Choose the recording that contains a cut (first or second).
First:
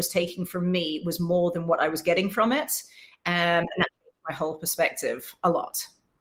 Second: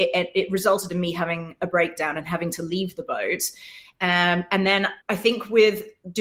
second